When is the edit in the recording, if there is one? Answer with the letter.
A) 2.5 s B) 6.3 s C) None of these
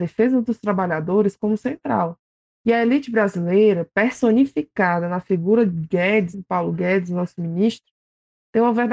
B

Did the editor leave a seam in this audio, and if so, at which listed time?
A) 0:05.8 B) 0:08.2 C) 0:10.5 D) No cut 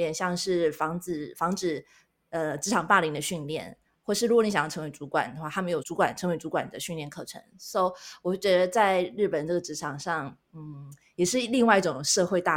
A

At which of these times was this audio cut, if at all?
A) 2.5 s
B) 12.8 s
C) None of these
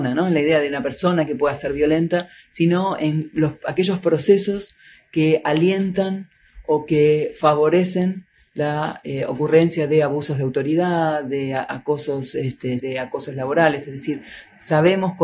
B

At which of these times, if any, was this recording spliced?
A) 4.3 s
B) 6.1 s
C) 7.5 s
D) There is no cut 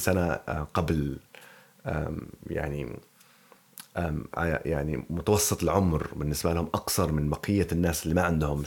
A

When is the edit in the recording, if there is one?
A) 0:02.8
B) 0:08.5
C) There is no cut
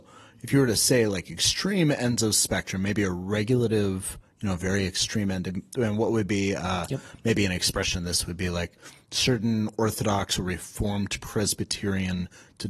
C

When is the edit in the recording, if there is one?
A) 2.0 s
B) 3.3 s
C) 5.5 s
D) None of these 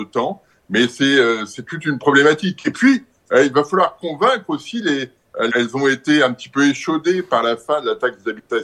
C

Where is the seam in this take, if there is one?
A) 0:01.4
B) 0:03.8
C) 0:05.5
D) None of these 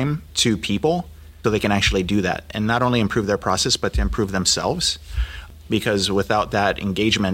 A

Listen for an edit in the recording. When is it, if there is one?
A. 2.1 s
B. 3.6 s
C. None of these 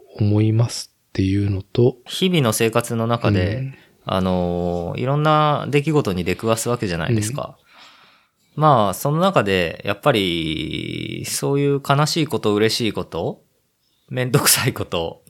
A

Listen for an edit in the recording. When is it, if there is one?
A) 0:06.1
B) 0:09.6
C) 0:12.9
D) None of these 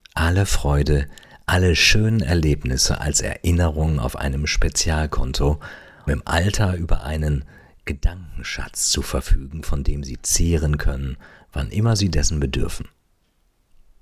A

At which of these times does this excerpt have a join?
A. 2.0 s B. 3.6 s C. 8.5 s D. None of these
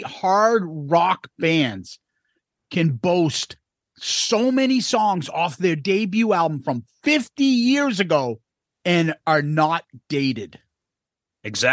D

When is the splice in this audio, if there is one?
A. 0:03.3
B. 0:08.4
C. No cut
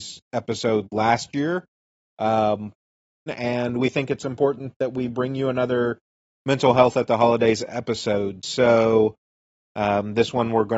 A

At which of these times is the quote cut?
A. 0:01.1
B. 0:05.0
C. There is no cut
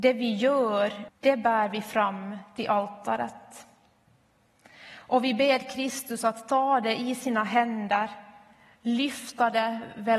A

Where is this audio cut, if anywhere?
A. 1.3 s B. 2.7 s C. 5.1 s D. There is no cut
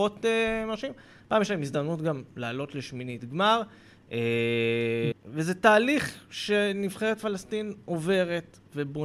C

